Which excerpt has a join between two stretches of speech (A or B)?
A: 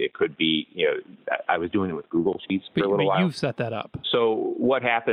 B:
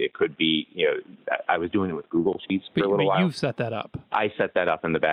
A